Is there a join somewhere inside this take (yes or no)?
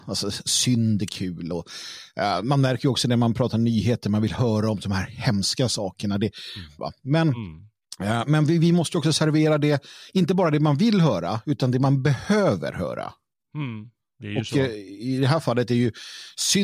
yes